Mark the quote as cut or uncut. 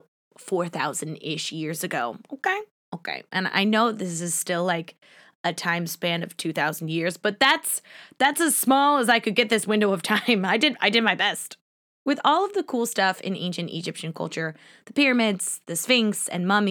uncut